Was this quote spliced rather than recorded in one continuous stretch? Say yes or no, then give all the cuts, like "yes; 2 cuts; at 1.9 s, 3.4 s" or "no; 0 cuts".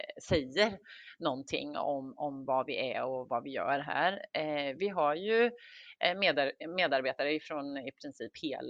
no; 0 cuts